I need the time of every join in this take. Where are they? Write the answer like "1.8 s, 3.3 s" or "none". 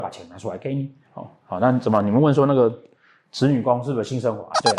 1.0 s

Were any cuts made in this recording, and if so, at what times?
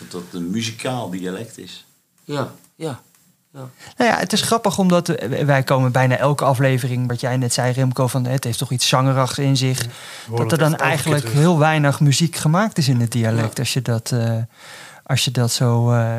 none

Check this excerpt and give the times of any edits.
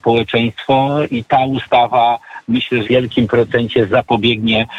2.8 s, 3.9 s

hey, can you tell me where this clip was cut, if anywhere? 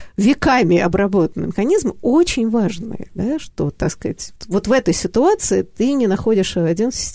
4.4 s

